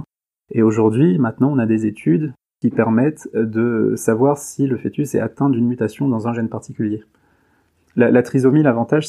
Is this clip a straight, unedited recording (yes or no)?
yes